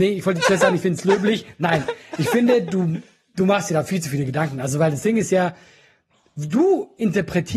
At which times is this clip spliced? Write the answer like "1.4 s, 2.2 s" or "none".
none

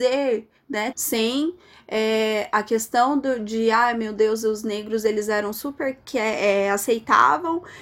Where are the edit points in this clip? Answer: 0.9 s

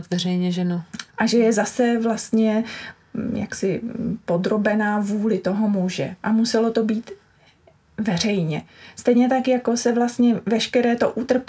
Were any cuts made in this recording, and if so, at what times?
1.1 s

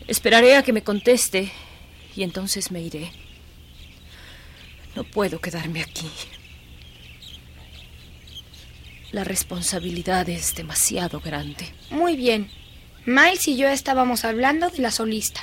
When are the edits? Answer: 9.1 s, 11.7 s

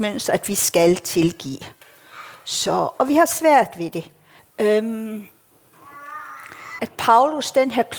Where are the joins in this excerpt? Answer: 4.4 s, 6.8 s

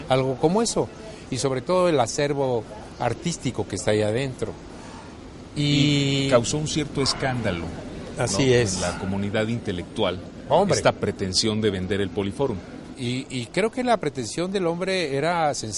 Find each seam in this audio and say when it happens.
none

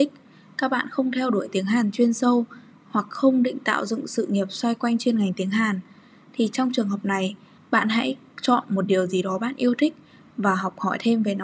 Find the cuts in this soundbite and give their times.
7.6 s

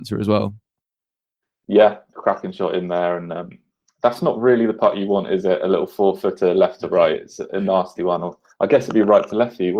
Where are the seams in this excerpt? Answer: 2.1 s

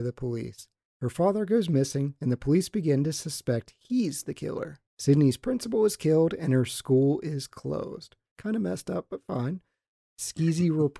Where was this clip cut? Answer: 0.9 s, 4.9 s, 8.3 s

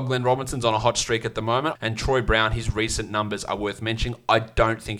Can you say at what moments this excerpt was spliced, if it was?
1.8 s

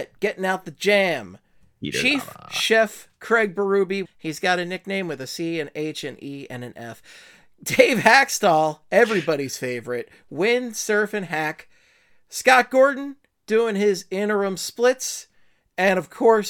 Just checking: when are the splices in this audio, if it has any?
4.0 s

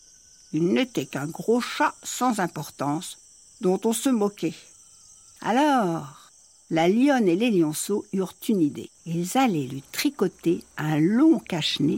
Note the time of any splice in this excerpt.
5.4 s, 9.0 s

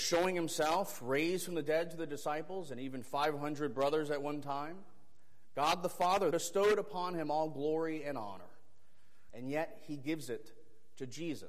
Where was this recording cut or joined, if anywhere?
6.3 s, 9.3 s

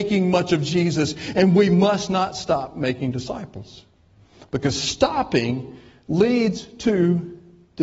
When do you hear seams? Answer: none

